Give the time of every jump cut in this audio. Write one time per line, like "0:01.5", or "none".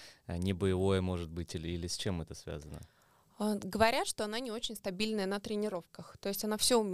none